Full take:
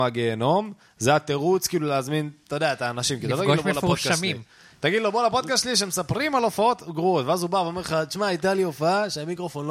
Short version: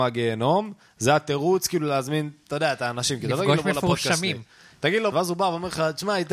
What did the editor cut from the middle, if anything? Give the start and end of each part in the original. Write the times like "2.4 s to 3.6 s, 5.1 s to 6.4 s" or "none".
5.1 s to 7.2 s